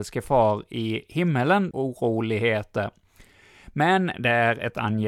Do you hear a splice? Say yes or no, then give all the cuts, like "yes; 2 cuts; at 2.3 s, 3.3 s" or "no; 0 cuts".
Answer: yes; 1 cut; at 1.7 s